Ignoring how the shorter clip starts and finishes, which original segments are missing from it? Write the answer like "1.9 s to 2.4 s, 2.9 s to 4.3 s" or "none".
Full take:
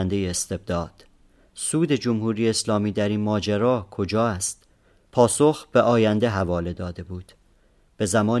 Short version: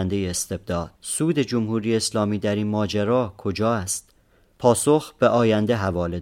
1.0 s to 1.5 s